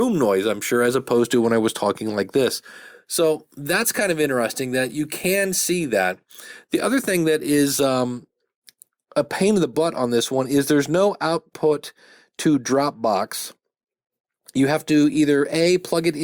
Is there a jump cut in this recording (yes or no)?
no